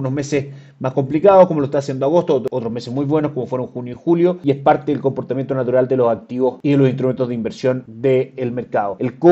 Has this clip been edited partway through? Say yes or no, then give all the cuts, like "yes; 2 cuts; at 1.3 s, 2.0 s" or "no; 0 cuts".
no; 0 cuts